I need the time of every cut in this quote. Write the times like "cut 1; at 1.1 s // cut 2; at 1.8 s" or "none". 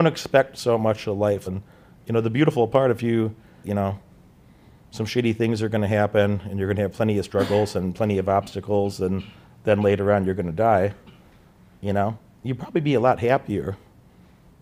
cut 1; at 1.5 s // cut 2; at 3.6 s